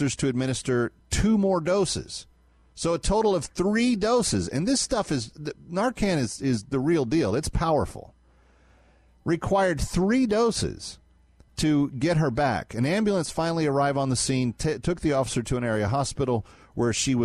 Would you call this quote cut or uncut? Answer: uncut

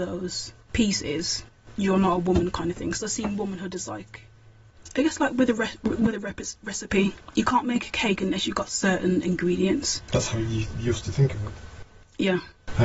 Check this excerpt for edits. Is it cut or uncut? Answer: uncut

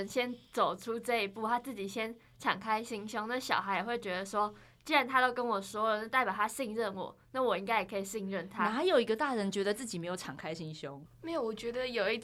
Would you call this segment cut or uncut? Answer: cut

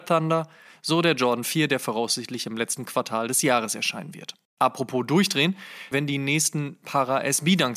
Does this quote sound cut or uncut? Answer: cut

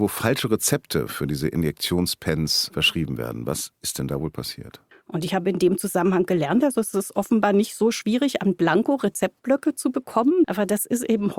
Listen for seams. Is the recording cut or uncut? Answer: cut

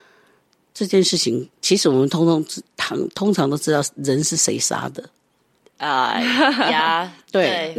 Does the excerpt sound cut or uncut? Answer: cut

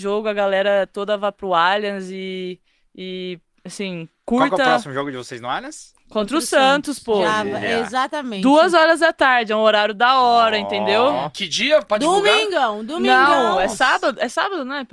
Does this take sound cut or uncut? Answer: uncut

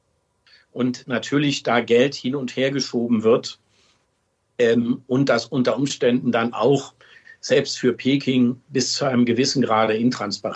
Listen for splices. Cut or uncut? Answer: cut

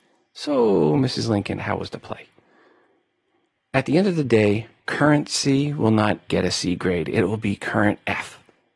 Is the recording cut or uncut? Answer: cut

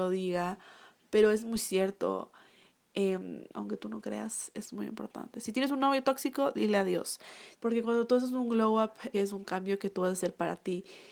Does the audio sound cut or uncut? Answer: cut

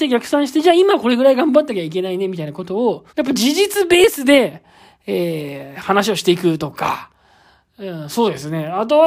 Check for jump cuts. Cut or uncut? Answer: cut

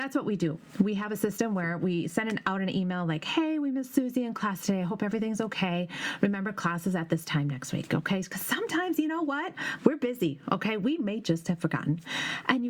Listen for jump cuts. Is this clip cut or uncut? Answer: cut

